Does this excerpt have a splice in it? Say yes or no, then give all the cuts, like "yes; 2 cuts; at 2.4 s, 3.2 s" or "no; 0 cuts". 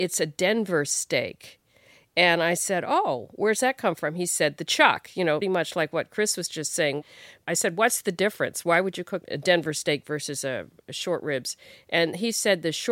yes; 1 cut; at 5.4 s